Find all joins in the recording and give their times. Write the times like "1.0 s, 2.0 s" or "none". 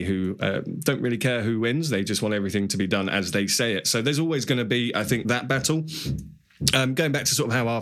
none